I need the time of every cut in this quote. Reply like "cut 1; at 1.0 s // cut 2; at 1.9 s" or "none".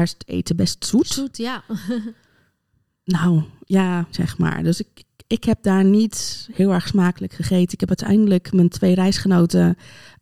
cut 1; at 4.1 s